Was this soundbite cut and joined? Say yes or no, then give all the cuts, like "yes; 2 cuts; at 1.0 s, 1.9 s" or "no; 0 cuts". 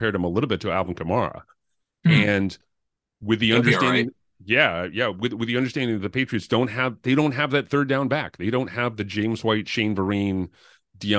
no; 0 cuts